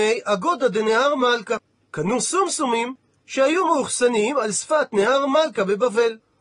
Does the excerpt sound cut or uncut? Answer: uncut